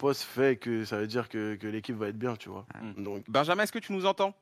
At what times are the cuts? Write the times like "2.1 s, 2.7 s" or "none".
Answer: 3.2 s